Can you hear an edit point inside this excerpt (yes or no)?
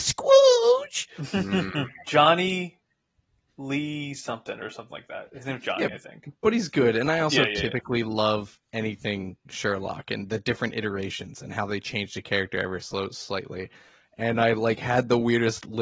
yes